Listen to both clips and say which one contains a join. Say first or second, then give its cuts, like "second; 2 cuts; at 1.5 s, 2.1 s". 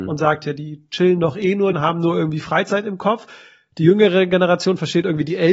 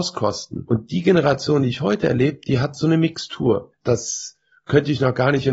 first; 1 cut; at 1.7 s